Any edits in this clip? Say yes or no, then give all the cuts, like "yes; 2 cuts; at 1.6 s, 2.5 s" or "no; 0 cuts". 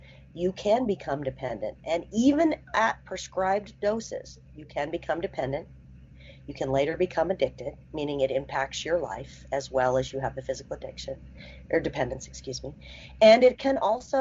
no; 0 cuts